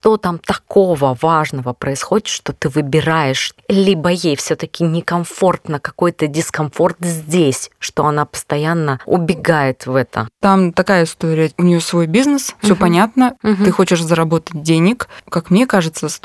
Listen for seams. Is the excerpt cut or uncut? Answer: cut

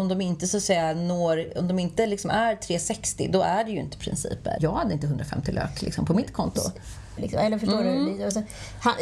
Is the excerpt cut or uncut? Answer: cut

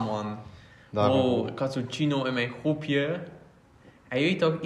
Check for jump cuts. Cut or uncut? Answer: uncut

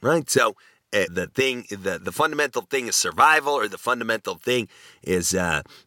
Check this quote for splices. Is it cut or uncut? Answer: cut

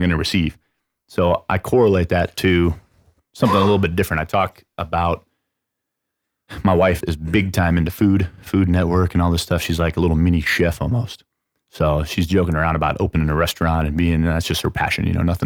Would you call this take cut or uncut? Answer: cut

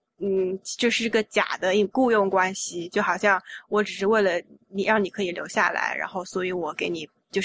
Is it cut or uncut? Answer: cut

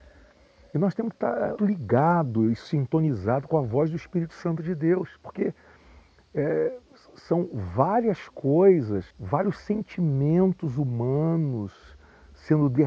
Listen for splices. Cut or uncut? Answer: cut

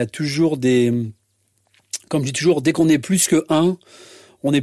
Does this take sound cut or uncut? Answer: uncut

